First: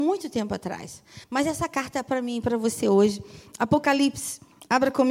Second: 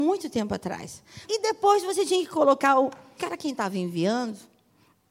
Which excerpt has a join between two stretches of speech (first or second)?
second